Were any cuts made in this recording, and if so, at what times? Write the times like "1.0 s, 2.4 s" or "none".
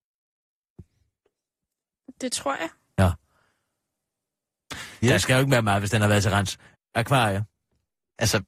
5.0 s, 6.7 s